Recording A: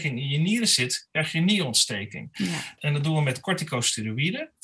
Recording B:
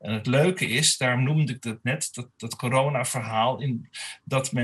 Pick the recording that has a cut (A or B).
A